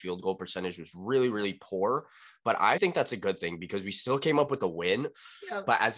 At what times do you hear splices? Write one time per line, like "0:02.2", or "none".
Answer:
0:02.8